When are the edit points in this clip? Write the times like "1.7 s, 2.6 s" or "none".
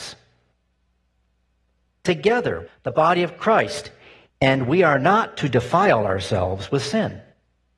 2.7 s, 4.3 s